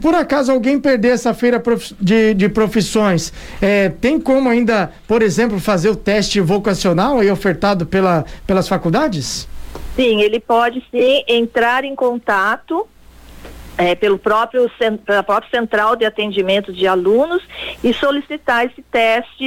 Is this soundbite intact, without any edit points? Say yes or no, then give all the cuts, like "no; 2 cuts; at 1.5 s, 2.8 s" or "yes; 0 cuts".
yes; 0 cuts